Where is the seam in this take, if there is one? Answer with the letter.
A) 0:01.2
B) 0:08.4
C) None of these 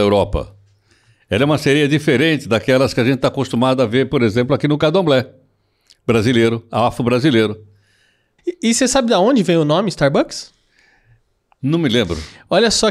B